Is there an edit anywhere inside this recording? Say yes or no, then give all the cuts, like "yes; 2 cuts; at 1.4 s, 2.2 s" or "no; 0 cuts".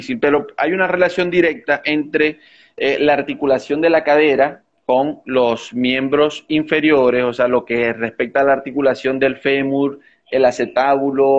no; 0 cuts